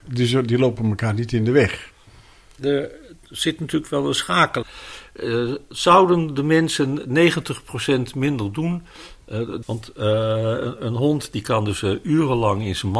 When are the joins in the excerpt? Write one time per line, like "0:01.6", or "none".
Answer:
0:04.6
0:09.6